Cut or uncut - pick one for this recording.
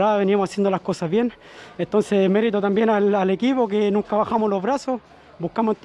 uncut